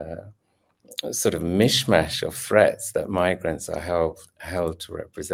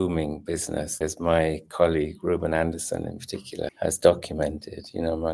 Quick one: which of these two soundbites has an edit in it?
second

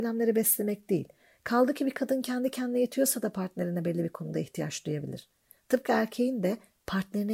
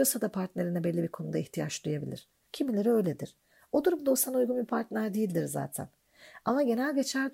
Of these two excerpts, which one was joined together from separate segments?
second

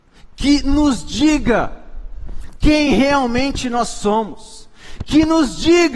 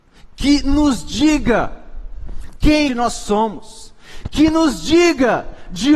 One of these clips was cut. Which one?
second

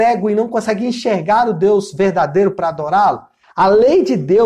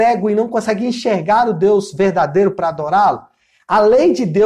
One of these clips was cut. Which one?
first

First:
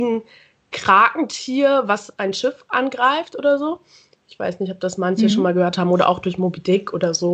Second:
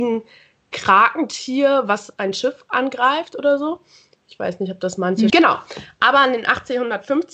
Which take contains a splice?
second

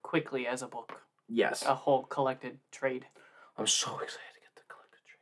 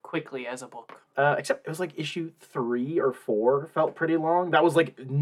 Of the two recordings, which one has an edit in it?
second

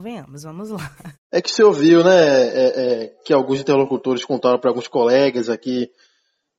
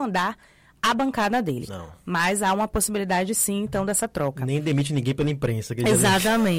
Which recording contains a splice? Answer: second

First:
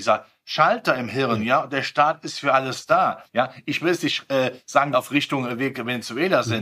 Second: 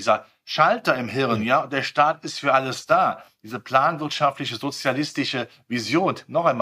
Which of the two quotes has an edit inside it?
first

